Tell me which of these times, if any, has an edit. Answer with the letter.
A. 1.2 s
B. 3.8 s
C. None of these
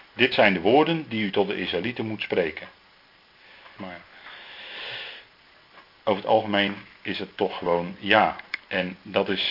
B